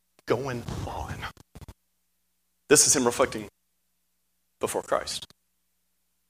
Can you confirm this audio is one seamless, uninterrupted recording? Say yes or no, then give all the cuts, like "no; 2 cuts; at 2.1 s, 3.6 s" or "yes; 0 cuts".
yes; 0 cuts